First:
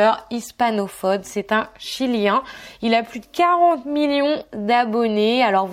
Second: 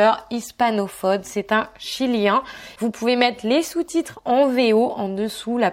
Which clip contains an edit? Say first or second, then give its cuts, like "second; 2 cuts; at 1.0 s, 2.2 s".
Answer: second; 1 cut; at 2.8 s